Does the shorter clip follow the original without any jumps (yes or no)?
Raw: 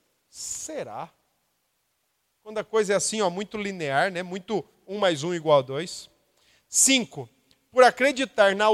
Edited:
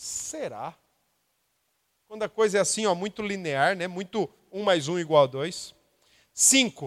yes